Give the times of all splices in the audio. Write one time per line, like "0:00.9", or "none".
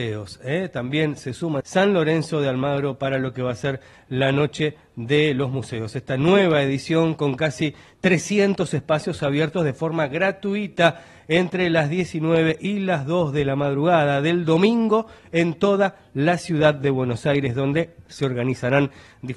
0:01.6